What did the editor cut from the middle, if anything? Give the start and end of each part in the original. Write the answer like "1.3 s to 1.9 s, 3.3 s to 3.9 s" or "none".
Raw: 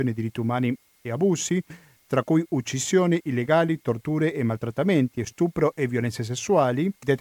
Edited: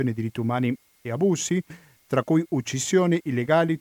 none

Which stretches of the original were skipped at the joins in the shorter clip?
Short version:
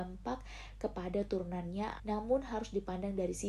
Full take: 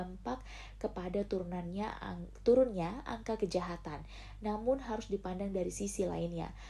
2.0 s to 4.4 s

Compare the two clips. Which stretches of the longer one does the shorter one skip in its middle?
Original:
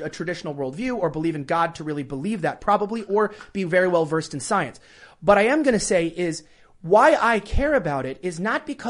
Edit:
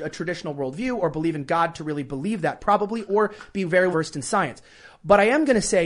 3.9 s to 4.1 s

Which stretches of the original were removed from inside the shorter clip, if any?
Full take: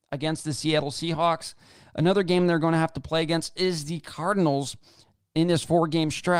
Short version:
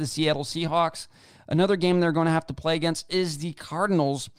none

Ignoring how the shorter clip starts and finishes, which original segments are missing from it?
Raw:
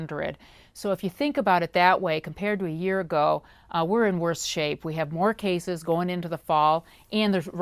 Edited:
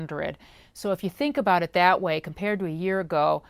none

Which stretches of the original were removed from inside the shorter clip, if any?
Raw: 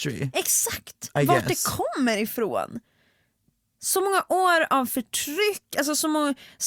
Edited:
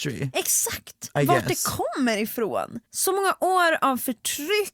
2.9 s to 3.7 s

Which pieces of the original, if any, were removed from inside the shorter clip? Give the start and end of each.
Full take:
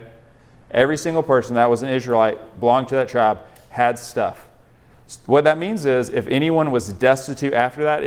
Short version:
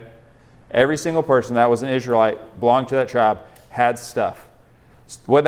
none

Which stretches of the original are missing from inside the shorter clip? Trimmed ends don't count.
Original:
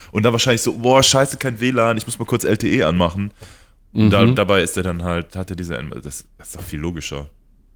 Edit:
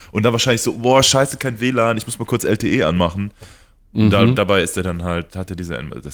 none

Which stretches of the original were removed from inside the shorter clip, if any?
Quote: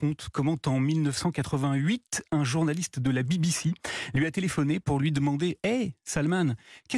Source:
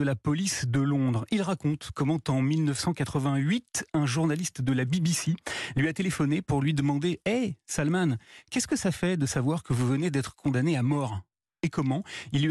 none

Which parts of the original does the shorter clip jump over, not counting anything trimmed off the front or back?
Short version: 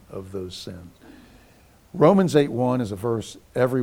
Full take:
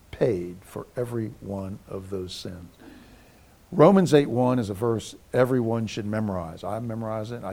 none

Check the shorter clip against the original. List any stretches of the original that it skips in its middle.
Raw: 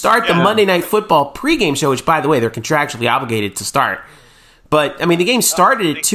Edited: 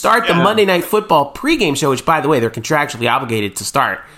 none

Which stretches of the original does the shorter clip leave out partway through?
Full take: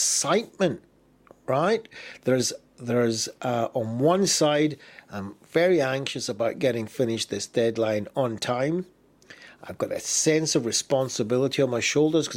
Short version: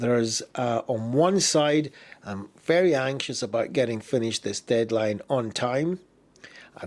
none

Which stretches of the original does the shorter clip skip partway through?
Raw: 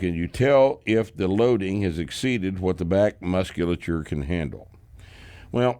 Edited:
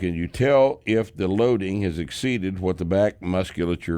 none

